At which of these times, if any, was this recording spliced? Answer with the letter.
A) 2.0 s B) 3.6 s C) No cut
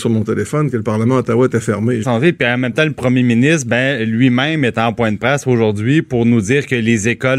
A